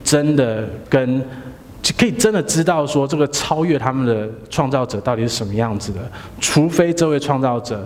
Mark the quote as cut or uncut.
uncut